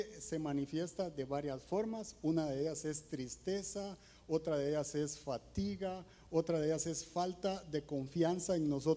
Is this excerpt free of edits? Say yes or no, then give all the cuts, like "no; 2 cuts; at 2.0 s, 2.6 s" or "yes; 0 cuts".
yes; 0 cuts